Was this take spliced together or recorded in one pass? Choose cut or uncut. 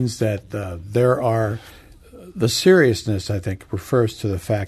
uncut